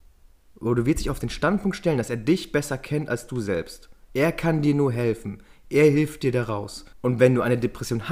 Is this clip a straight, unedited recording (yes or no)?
no